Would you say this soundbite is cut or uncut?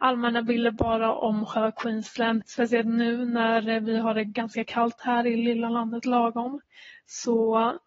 cut